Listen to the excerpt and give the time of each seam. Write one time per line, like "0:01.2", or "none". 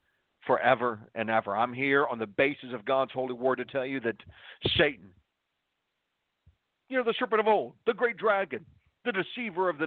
none